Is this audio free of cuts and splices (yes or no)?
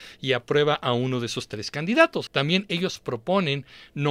no